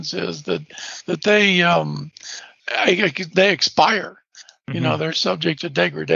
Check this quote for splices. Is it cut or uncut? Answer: cut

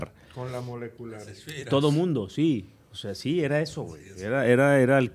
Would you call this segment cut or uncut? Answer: uncut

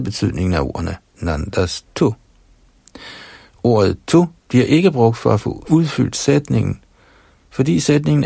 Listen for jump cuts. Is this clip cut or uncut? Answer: cut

